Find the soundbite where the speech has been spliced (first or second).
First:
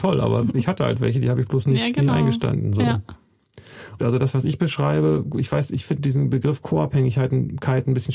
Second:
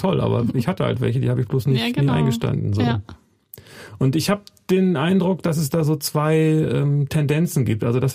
first